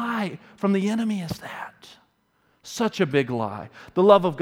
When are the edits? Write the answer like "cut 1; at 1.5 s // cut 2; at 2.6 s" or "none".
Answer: none